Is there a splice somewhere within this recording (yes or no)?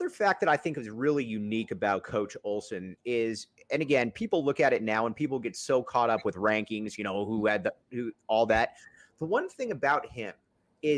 no